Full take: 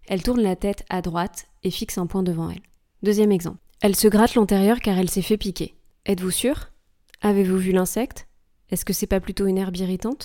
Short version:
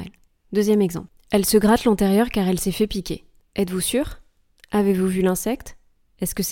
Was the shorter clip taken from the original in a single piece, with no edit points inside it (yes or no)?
yes